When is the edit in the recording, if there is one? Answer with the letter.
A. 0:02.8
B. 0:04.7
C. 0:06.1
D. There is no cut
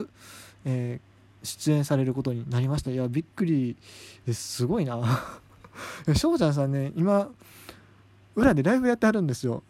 D